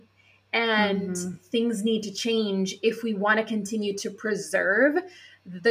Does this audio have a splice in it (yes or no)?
no